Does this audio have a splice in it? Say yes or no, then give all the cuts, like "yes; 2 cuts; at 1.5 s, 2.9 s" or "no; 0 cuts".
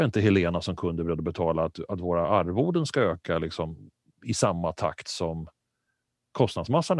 no; 0 cuts